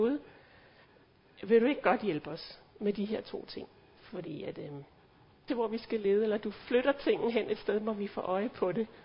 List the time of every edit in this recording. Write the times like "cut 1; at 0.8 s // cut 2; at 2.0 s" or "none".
cut 1; at 5.5 s